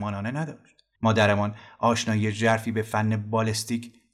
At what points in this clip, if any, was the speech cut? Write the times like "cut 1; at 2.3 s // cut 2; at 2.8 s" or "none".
cut 1; at 0.9 s